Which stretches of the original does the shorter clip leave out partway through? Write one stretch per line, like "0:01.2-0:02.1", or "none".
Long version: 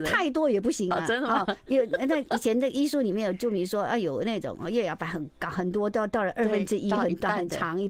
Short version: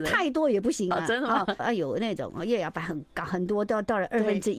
0:01.6-0:03.8

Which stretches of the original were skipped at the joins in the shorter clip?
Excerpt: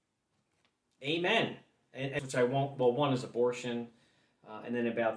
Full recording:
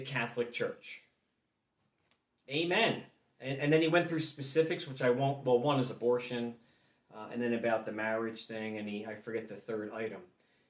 0:03.7-0:04.9

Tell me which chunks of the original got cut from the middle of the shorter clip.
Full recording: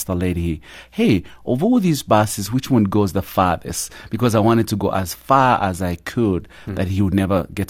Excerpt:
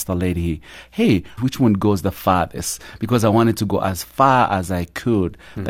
0:01.4-0:02.5

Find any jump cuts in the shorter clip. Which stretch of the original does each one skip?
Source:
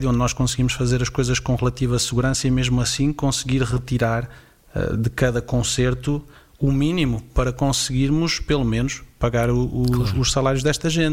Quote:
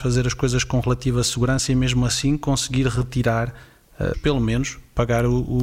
0:04.9-0:08.4

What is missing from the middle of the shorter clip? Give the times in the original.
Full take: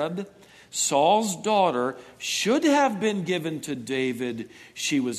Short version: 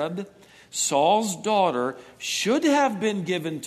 none

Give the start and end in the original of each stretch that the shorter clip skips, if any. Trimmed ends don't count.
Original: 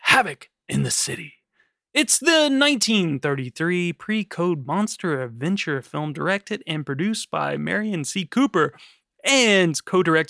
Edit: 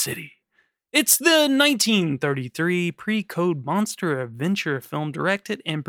none

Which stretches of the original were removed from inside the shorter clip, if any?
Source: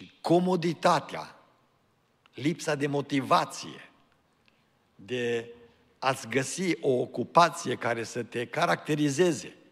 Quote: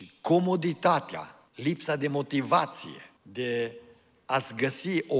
0:01.5-0:02.3
0:04.0-0:04.9

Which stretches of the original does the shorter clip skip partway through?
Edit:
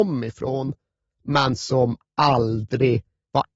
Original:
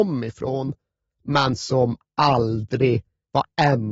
none

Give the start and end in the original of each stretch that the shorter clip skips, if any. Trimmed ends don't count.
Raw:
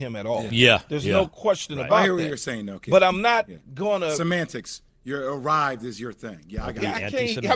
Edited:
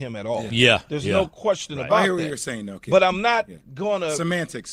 none

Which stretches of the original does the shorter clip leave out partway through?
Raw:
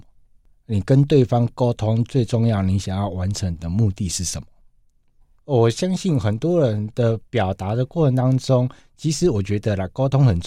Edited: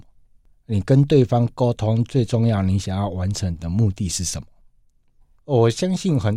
none

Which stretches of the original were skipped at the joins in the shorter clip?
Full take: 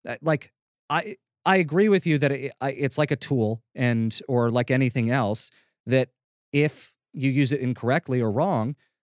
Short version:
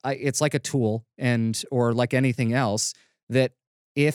none

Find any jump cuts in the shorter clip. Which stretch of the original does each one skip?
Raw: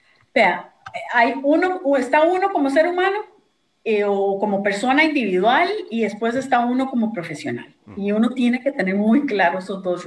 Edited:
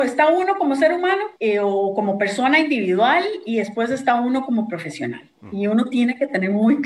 0:03.3-0:03.8

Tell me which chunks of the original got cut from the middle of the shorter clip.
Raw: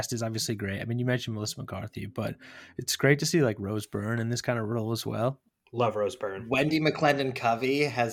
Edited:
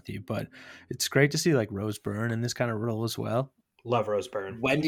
none

